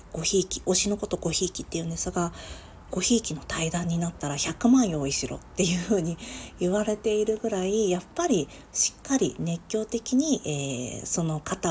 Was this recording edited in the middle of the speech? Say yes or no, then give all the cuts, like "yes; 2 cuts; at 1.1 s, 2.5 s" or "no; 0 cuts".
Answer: yes; 1 cut; at 2.9 s